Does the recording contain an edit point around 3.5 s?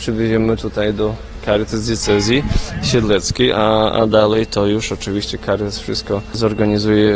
no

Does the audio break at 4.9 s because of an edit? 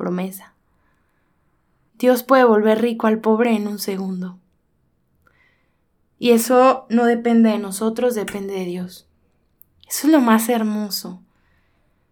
no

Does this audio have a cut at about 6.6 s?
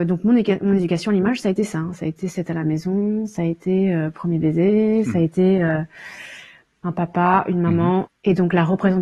yes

